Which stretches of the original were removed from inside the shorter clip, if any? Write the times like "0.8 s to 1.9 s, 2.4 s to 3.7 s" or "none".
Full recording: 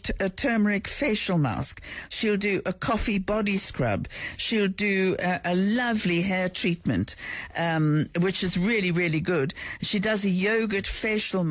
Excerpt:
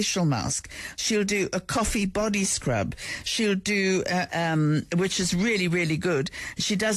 5.4 s to 7.5 s